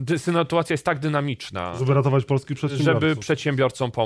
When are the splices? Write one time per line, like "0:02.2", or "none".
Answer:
none